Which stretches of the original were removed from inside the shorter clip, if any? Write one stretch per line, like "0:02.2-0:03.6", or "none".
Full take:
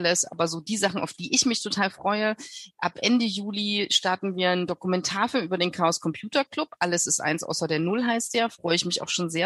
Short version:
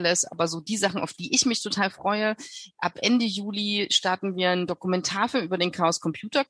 none